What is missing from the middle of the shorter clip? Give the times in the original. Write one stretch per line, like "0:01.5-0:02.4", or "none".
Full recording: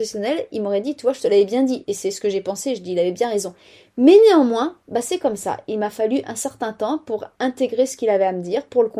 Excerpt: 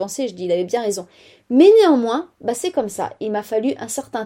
none